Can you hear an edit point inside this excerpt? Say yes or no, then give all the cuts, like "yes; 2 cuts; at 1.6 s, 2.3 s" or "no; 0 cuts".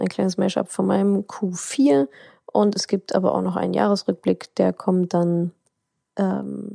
no; 0 cuts